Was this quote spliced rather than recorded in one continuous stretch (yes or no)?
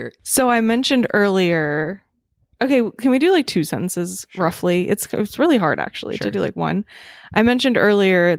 no